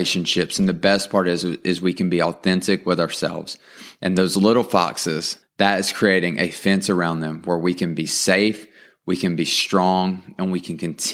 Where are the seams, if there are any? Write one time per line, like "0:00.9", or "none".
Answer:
0:05.4